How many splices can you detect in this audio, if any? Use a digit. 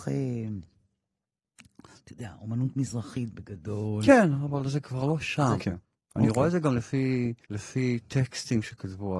2